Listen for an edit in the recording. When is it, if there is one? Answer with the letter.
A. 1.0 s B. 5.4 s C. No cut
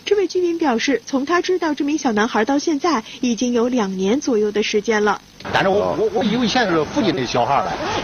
B